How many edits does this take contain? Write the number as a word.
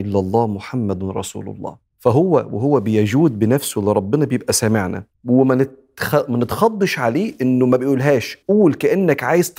three